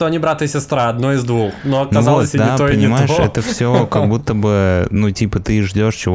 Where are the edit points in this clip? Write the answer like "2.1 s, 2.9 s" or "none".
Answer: none